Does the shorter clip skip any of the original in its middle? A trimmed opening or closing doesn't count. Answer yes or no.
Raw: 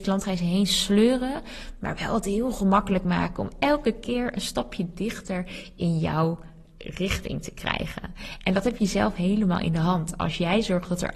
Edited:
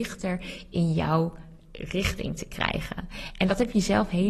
no